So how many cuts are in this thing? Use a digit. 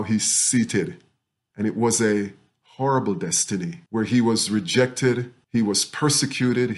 3